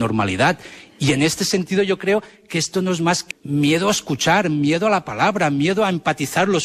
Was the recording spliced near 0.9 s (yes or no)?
no